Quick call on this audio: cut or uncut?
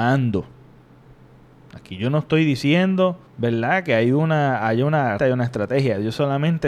cut